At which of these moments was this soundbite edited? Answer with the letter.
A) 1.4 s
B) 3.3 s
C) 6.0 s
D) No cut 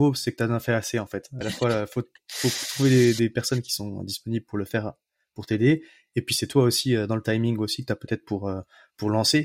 A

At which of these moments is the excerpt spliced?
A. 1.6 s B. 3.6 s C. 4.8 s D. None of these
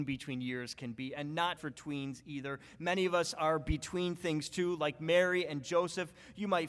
A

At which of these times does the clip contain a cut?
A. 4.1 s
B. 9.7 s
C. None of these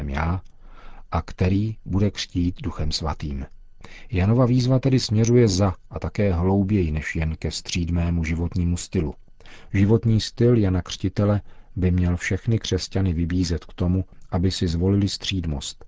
B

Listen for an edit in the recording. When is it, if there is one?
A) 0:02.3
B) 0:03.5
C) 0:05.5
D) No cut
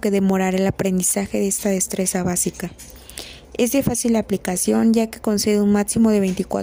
D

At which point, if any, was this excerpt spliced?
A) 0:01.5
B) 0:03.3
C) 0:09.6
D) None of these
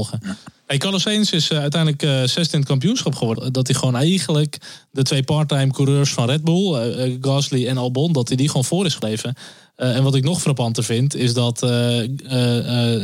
B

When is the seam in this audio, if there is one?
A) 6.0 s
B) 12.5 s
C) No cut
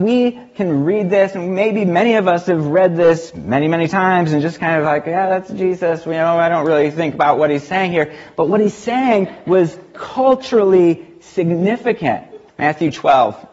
B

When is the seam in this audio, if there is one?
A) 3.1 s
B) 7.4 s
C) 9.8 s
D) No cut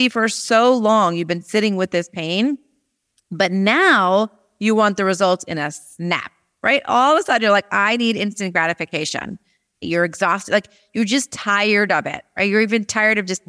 C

